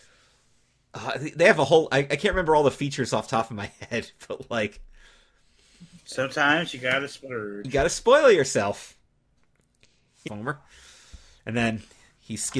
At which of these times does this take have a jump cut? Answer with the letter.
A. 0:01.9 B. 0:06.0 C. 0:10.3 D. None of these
C